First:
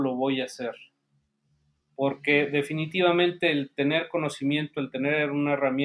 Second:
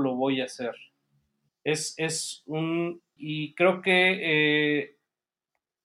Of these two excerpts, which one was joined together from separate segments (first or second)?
second